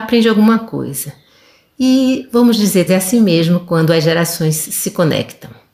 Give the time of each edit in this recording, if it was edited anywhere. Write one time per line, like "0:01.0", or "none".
0:02.9